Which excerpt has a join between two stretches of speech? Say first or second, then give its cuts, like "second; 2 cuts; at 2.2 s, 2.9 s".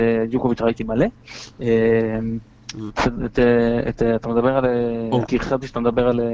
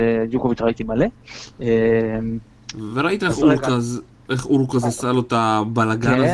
first; 2 cuts; at 2.9 s, 5.3 s